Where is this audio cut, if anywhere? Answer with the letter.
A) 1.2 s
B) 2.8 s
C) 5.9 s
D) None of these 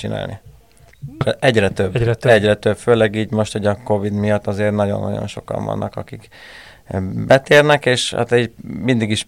A